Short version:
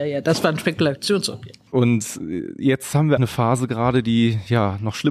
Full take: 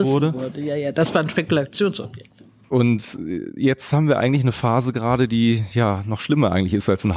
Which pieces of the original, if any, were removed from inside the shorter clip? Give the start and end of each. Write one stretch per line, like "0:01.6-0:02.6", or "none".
0:02.4-0:02.7
0:04.2-0:04.4